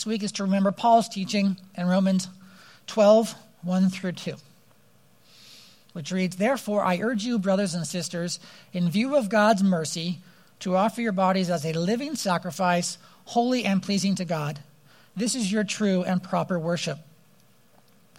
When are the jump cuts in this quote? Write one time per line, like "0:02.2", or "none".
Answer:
none